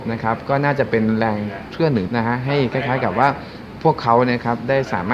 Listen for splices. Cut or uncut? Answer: cut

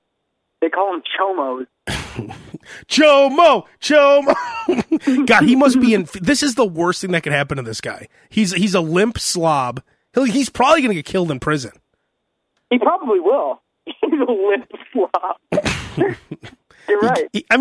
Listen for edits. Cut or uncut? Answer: uncut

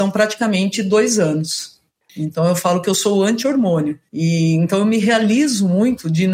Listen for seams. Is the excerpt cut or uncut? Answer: cut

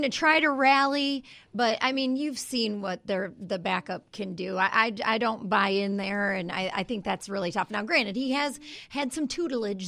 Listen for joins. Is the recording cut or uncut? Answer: uncut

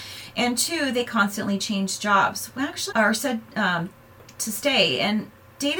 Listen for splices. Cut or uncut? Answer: cut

